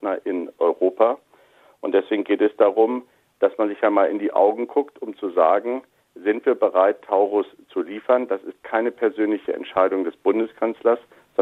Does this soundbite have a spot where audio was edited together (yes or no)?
no